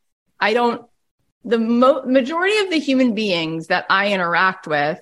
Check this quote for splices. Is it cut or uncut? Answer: uncut